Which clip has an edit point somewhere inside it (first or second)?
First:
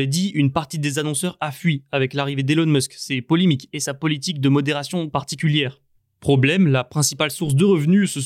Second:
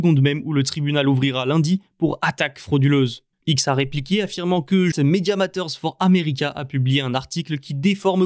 second